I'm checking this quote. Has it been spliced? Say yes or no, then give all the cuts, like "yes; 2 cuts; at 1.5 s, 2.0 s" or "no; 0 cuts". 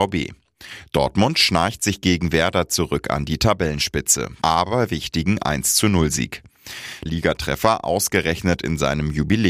yes; 2 cuts; at 4.4 s, 7.1 s